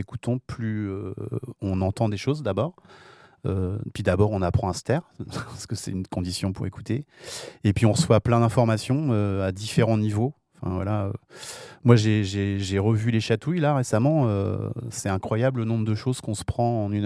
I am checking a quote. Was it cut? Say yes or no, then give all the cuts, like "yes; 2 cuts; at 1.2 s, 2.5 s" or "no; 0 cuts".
no; 0 cuts